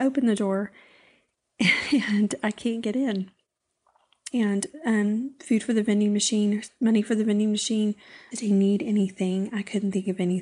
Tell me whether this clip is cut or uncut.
cut